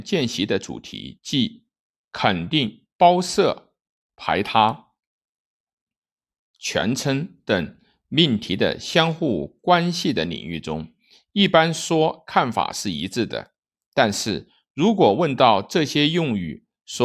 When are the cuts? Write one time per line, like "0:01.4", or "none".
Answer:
0:02.9
0:06.4

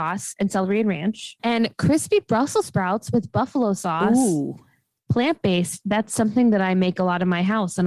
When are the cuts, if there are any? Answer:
0:01.4

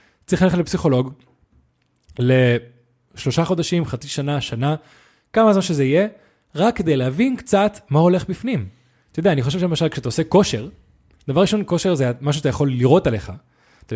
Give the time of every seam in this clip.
none

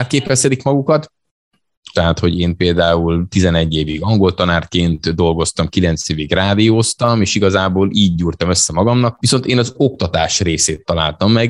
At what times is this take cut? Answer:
0:01.9
0:09.2

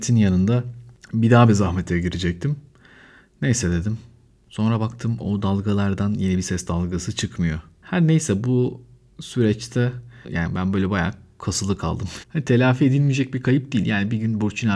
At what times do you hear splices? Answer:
0:12.2

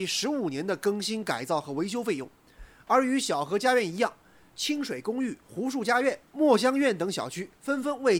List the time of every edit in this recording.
0:04.5
0:06.3

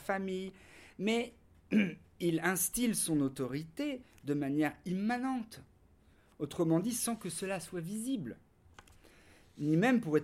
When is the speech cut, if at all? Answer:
none

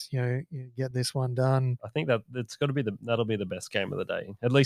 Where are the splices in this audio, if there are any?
none

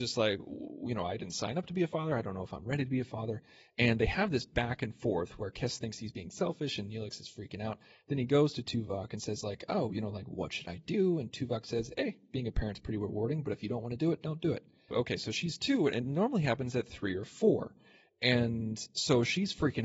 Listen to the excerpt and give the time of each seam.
0:14.9

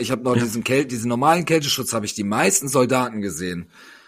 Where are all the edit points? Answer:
none

